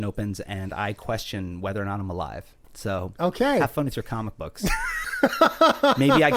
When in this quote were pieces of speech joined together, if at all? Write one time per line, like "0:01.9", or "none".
0:02.6
0:05.0